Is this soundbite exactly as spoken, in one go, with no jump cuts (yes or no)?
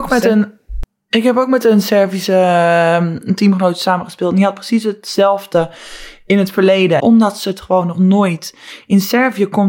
no